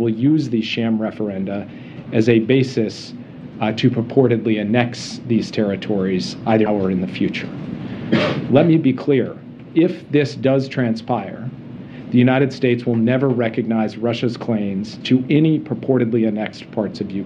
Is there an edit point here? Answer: yes; 1 cut; at 6.7 s

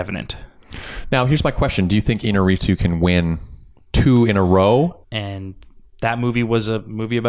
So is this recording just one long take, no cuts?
no; 1 cut; at 5.0 s

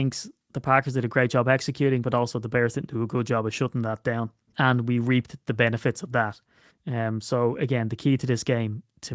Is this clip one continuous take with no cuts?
no; 2 cuts; at 4.5 s, 6.7 s

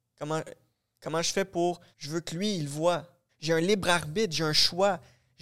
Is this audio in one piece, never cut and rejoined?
no; 2 cuts; at 1.9 s, 3.3 s

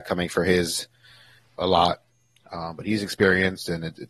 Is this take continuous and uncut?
no; 1 cut; at 1.6 s

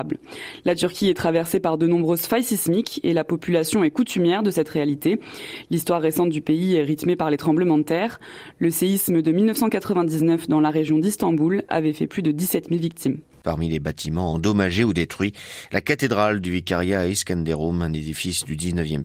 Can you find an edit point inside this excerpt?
yes; 1 cut; at 13.4 s

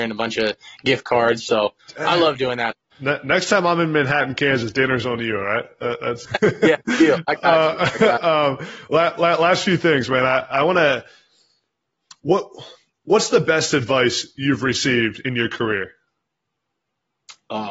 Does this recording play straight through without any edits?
no; 2 cuts; at 2.9 s, 6.2 s

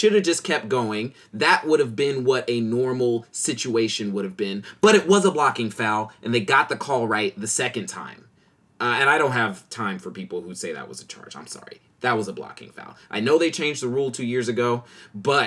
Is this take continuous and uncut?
yes; 0 cuts

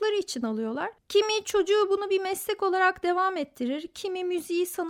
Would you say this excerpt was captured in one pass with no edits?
yes; 0 cuts

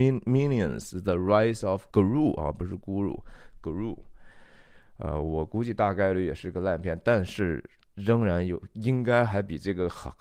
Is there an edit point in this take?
yes; 1 cut; at 1.9 s

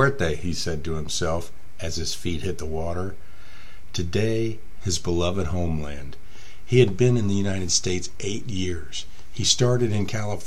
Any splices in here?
yes; 1 cut; at 4.8 s

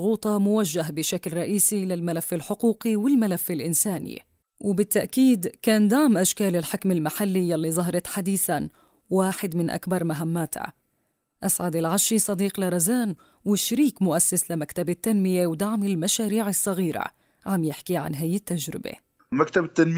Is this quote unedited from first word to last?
yes; 0 cuts

